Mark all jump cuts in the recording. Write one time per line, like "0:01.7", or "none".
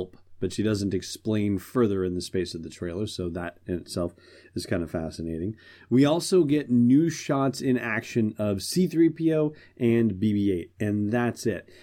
none